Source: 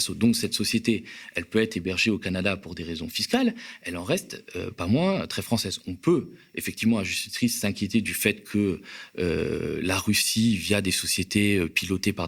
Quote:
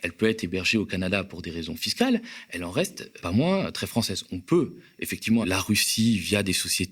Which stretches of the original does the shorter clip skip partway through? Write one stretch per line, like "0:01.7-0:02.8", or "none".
0:04.5-0:04.7
0:07.0-0:09.8